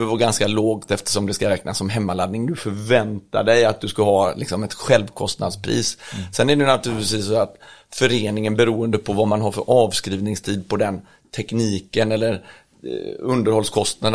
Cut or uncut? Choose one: uncut